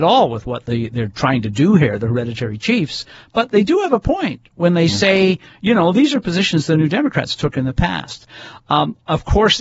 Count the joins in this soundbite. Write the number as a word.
zero